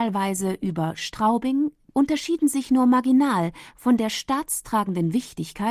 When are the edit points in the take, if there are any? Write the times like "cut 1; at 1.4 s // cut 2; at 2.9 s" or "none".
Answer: cut 1; at 1.9 s